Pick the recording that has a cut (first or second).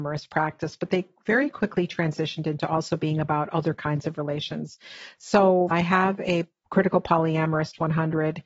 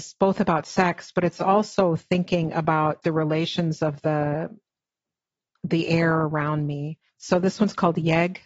first